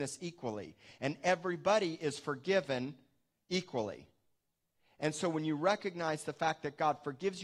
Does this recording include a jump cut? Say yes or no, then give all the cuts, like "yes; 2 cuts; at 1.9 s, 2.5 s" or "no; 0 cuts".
no; 0 cuts